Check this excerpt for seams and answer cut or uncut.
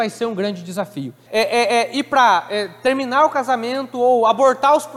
cut